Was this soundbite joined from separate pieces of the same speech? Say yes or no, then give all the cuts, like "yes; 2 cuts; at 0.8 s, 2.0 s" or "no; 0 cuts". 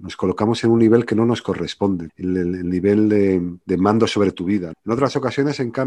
yes; 3 cuts; at 2.1 s, 3.6 s, 4.7 s